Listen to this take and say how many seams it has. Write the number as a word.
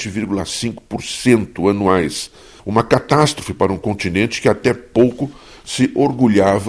one